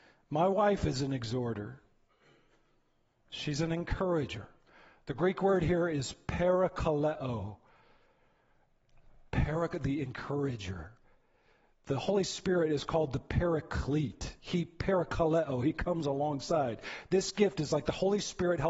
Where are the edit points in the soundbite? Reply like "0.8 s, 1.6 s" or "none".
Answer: none